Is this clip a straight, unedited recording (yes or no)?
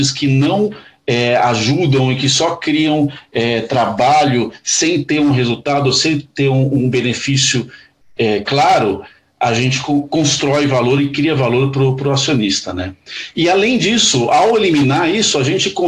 yes